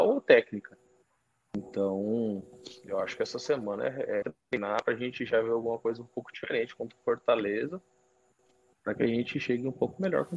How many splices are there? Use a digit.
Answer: 1